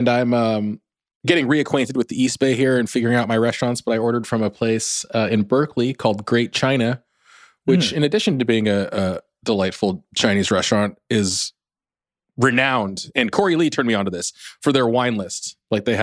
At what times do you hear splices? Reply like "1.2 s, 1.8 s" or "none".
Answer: none